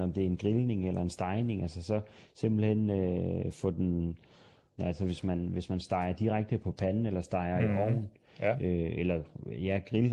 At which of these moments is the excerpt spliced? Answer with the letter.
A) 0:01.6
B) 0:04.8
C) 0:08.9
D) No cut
B